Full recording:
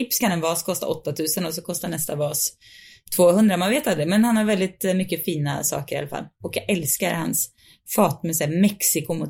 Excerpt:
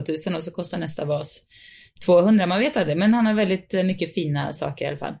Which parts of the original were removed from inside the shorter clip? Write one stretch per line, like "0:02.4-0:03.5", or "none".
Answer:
none